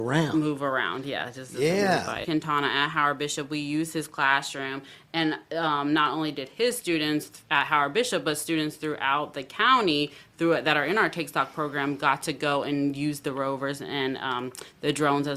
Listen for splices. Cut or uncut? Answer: cut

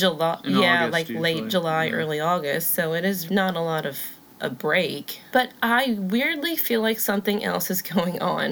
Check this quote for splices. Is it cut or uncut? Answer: cut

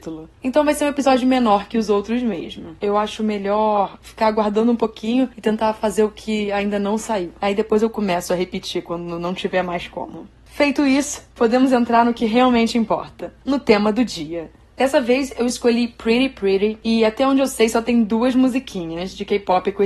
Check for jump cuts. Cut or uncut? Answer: cut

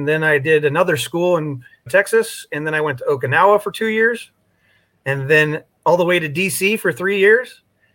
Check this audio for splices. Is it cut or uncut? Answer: cut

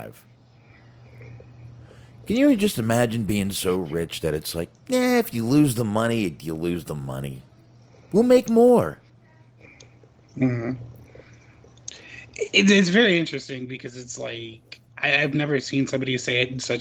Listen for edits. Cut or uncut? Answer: uncut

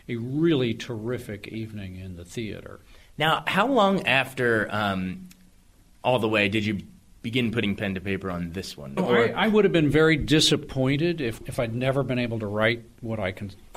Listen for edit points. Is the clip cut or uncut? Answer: cut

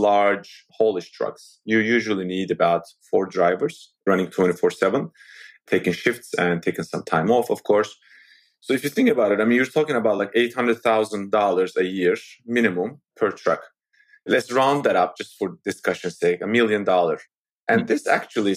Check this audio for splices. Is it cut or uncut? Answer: uncut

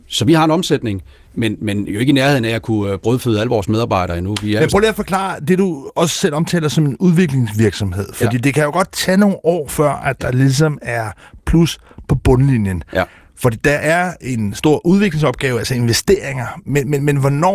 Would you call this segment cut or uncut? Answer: uncut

